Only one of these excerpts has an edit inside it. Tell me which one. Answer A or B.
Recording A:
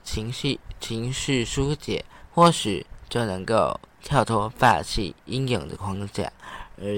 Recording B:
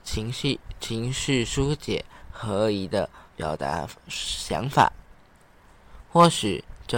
A